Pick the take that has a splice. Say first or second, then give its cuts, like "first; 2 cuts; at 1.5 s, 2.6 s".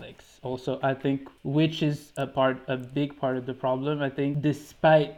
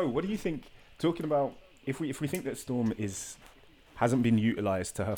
first; 1 cut; at 1.4 s